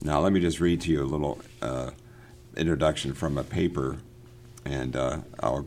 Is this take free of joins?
no; 1 cut; at 2.5 s

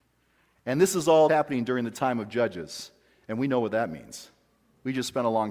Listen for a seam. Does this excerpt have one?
yes; 1 cut; at 1.3 s

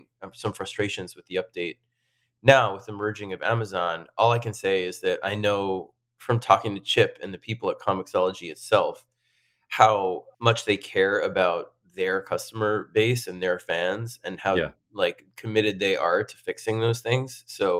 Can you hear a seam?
no; 0 cuts

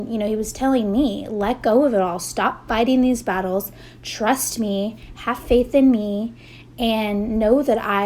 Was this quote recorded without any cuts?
yes; 0 cuts

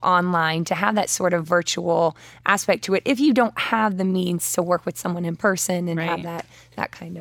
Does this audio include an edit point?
no; 0 cuts

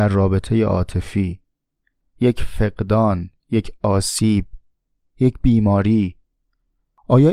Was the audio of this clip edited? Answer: no; 0 cuts

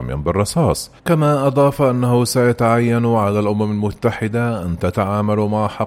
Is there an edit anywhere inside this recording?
yes; 1 cut; at 1.0 s

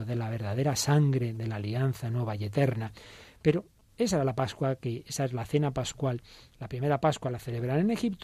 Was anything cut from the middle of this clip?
no; 0 cuts

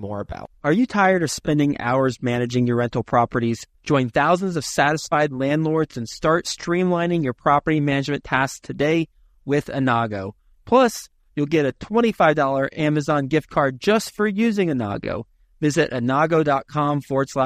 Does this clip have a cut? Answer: yes; 1 cut; at 3.7 s

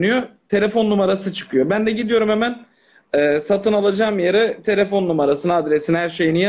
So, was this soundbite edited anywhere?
no; 0 cuts

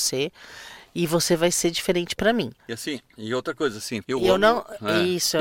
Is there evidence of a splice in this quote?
yes; 2 cuts; at 2.6 s, 4.0 s

